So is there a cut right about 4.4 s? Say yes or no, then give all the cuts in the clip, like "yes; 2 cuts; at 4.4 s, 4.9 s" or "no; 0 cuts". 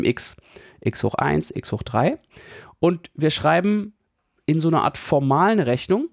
no; 1 cut; at 1.5 s